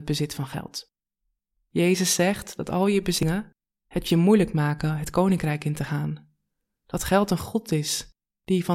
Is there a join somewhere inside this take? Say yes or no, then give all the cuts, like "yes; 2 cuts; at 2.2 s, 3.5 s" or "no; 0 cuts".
yes; 1 cut; at 1.5 s